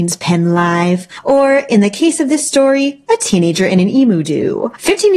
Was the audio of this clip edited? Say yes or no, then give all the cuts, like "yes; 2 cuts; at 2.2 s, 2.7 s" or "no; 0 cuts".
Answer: no; 0 cuts